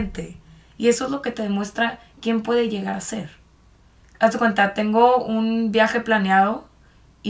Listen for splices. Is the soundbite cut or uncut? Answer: cut